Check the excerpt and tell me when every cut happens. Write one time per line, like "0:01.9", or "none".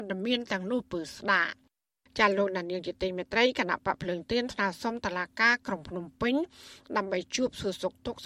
none